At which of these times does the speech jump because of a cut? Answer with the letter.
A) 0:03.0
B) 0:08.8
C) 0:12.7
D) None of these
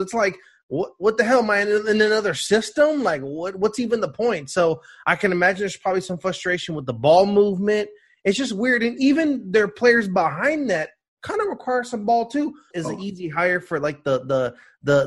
C